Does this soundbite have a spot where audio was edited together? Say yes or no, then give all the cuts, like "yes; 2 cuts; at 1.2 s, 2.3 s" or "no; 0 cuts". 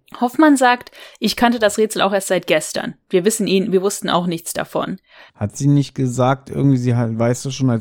yes; 1 cut; at 5.3 s